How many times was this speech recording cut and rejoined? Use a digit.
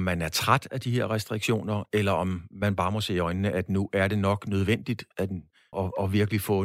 1